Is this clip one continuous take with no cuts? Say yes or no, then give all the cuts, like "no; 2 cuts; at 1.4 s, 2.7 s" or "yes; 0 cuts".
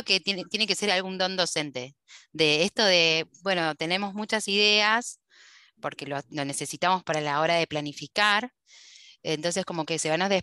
yes; 0 cuts